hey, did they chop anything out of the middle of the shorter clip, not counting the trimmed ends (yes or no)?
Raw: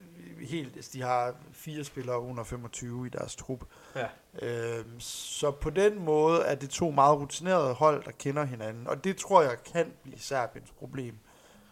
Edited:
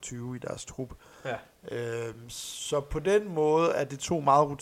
no